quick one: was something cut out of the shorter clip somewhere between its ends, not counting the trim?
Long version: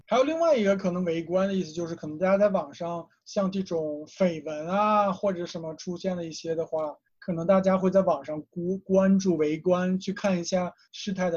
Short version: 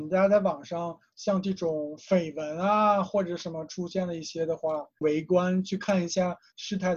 yes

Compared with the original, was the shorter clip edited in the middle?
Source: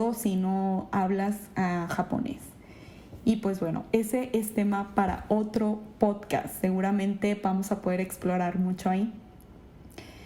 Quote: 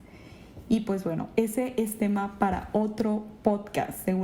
no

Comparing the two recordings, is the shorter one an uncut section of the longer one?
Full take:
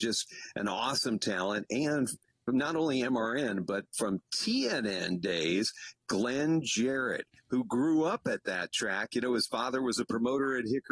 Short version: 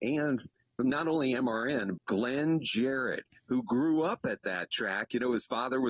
no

